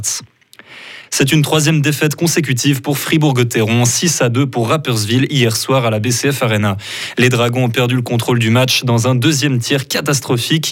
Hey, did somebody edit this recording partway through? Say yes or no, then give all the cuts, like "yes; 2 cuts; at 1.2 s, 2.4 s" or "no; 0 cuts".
no; 0 cuts